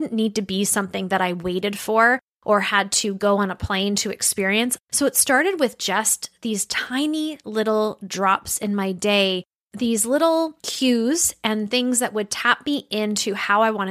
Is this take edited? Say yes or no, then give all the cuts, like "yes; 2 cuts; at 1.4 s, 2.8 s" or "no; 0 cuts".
yes; 1 cut; at 4.8 s